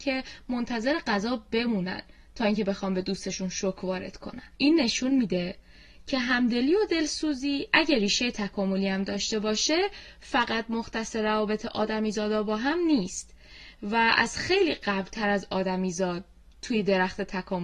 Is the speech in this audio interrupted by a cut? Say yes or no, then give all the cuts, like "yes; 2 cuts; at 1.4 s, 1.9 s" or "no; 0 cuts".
yes; 1 cut; at 4.5 s